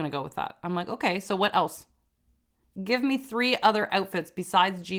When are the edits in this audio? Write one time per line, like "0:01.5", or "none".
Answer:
none